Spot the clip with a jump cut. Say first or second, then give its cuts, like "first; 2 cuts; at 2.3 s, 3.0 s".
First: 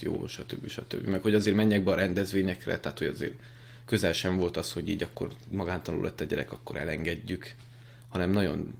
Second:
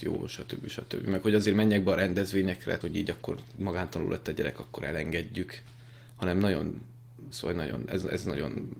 second; 2 cuts; at 2.8 s, 7.3 s